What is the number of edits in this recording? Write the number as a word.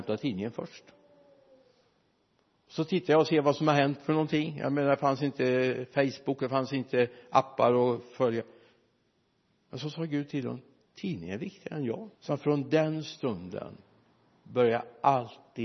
two